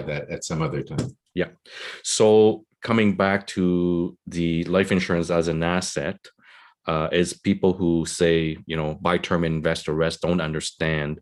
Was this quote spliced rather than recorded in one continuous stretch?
no; 0 cuts

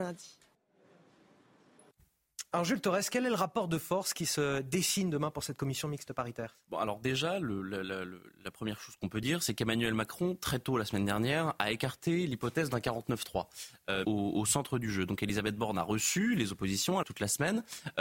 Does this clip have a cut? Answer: yes; 2 cuts; at 14.0 s, 17.0 s

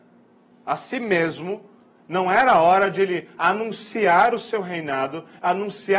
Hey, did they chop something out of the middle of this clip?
no; 0 cuts

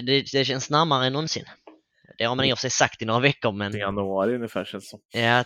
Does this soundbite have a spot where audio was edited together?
yes; 1 cut; at 3.7 s

